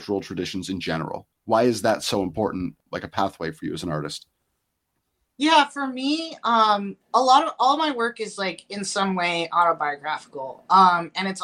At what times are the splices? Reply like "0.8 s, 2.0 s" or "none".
none